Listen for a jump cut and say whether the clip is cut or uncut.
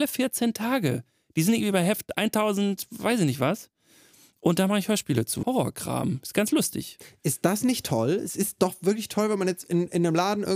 cut